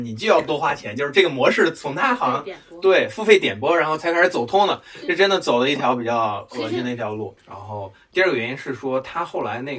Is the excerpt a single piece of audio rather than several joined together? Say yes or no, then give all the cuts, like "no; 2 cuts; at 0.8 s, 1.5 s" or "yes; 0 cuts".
no; 1 cut; at 7.4 s